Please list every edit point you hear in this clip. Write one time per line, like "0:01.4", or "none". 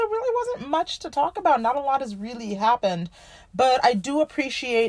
none